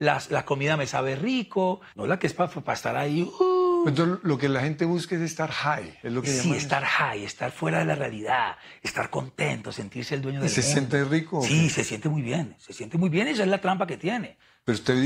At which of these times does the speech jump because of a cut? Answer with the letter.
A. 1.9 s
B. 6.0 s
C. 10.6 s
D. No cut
A